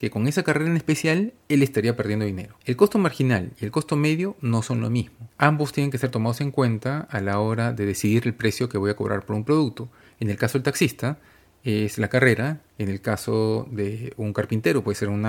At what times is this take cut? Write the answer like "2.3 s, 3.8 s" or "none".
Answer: none